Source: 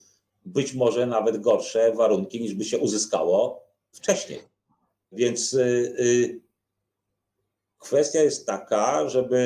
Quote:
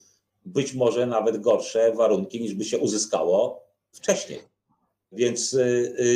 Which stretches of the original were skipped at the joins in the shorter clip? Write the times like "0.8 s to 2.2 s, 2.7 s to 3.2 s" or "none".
none